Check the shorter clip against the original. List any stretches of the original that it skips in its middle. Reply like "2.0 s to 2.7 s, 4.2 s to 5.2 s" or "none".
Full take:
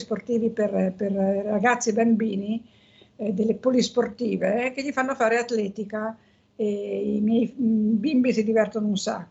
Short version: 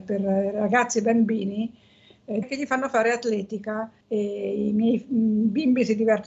3.3 s to 4.7 s, 6.3 s to 6.5 s